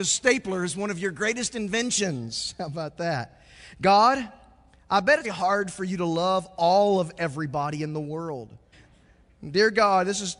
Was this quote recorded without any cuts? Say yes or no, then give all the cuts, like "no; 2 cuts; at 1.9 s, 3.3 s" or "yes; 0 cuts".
no; 2 cuts; at 5.2 s, 8.7 s